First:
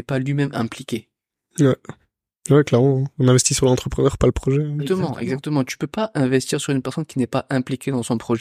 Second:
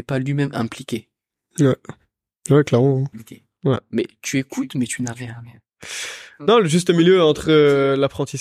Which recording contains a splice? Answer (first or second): second